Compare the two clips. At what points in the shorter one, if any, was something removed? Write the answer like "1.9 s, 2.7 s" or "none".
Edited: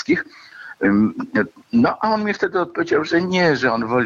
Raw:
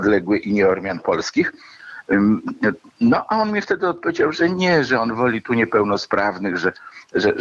none